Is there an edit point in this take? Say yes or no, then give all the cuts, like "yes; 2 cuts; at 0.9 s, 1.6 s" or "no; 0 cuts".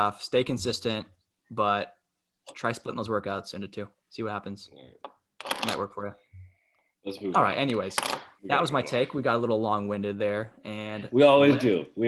no; 0 cuts